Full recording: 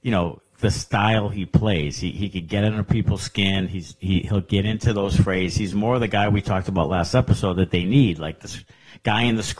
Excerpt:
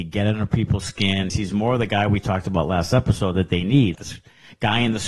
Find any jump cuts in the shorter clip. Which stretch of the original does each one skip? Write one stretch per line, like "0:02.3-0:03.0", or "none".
0:03.7-0:05.5
0:08.2-0:08.4